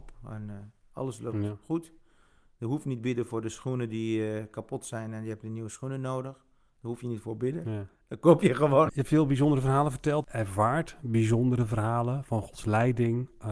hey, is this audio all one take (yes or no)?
no